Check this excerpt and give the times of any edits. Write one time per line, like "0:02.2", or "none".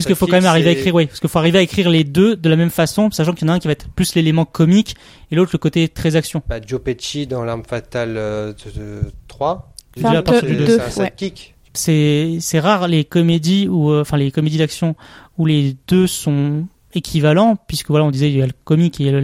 0:10.0